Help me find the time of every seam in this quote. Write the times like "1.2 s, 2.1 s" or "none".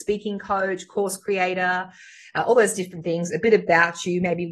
none